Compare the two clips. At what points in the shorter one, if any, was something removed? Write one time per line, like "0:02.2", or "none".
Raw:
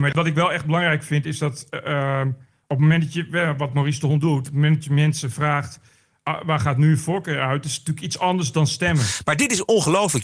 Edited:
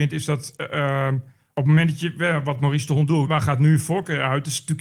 0:03.2